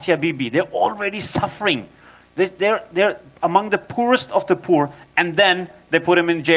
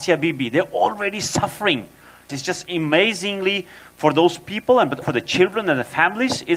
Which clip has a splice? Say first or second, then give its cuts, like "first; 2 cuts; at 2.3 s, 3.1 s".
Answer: second; 2 cuts; at 2.3 s, 5.0 s